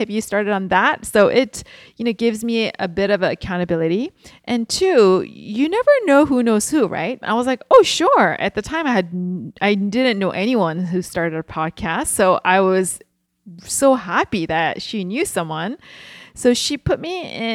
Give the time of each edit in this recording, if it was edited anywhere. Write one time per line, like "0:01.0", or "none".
0:07.2